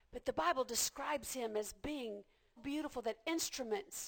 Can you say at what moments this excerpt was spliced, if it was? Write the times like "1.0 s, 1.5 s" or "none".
2.6 s